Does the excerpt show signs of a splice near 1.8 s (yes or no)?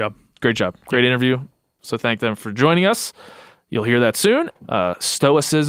yes